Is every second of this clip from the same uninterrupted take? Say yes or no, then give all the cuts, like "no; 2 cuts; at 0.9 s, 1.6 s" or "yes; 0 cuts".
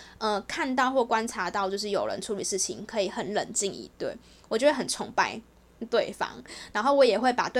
yes; 0 cuts